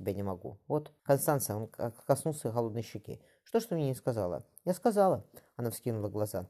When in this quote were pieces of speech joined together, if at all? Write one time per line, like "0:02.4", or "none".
0:01.0